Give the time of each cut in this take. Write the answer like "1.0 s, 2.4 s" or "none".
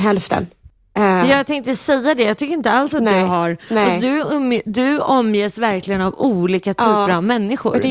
none